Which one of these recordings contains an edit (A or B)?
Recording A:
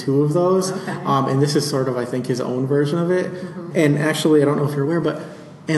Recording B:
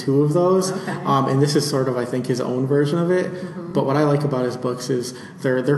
A